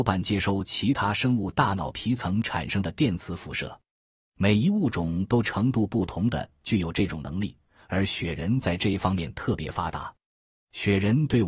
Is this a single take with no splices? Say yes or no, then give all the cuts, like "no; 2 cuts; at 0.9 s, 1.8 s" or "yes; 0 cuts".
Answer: yes; 0 cuts